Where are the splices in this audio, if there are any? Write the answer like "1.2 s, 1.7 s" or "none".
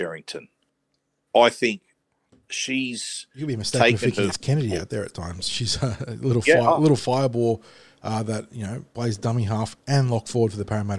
none